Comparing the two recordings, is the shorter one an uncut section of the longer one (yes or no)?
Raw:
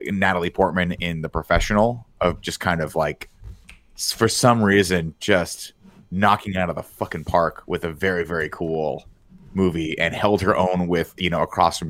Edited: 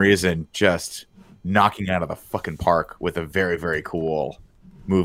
yes